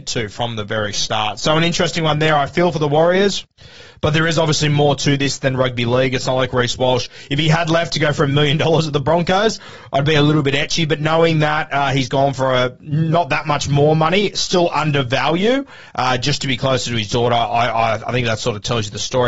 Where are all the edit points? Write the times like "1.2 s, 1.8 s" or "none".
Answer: none